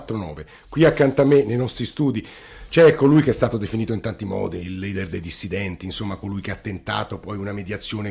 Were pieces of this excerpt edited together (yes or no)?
no